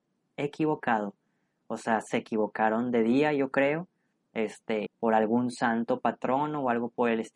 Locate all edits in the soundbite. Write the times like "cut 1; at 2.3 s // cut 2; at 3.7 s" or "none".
cut 1; at 4.9 s